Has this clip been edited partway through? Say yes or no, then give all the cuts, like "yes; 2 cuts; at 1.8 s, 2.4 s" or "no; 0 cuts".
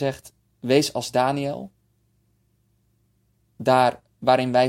no; 0 cuts